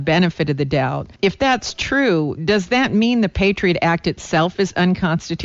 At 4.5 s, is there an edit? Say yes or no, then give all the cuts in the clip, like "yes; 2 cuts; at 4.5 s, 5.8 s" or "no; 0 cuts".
no; 2 cuts; at 1.2 s, 2.4 s